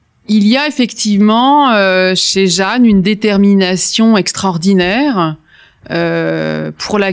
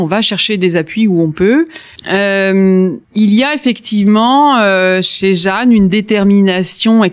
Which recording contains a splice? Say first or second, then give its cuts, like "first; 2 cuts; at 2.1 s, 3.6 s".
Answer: second; 2 cuts; at 2.0 s, 3.0 s